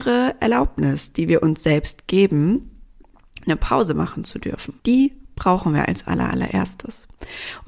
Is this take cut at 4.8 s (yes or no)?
yes